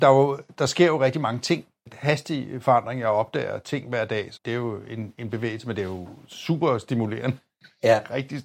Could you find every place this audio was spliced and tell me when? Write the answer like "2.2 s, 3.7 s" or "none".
1.9 s, 4.4 s